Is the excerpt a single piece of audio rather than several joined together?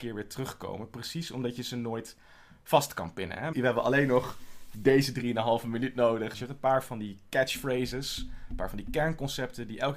no; 2 cuts; at 3.5 s, 6.3 s

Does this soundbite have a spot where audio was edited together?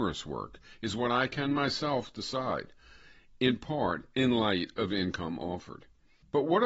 no; 0 cuts

